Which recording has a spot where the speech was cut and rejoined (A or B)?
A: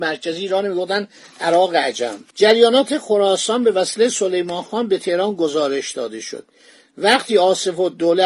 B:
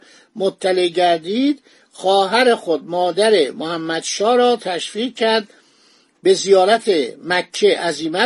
A